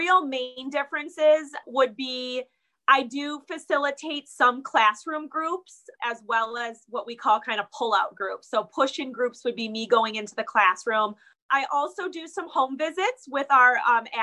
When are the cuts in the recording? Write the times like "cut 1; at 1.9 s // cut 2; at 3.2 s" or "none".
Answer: none

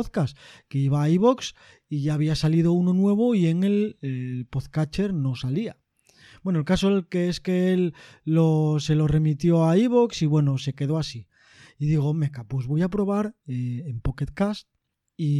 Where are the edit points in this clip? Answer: none

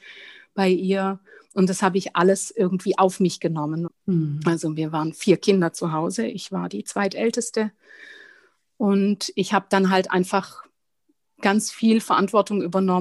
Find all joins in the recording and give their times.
cut 1; at 3.9 s

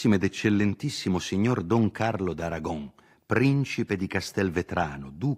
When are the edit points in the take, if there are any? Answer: none

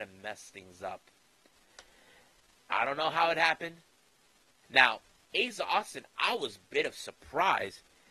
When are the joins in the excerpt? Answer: cut 1; at 2.6 s // cut 2; at 4.6 s

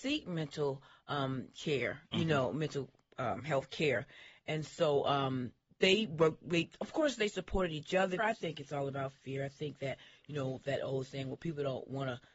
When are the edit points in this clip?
cut 1; at 8.2 s

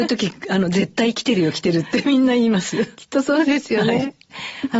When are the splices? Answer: none

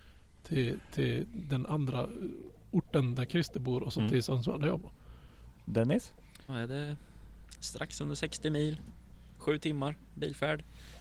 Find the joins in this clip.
cut 1; at 6.5 s

